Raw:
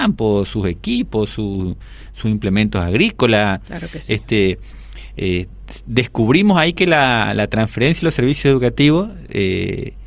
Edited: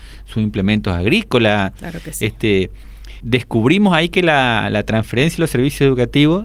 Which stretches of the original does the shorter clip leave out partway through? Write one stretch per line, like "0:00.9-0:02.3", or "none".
0:05.1-0:05.8